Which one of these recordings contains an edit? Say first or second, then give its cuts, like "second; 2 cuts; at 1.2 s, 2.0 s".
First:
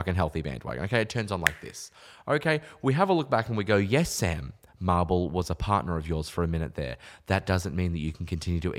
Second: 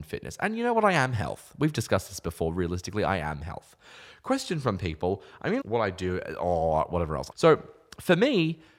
second; 2 cuts; at 5.6 s, 7.3 s